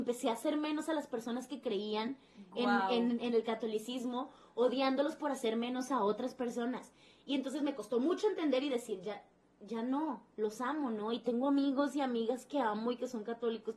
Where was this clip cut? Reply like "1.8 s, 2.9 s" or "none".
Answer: none